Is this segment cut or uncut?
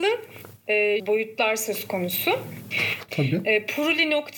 cut